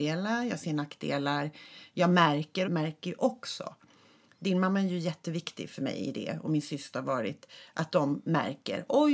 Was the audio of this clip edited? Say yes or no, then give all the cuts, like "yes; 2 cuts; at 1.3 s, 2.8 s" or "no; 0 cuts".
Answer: yes; 1 cut; at 2.6 s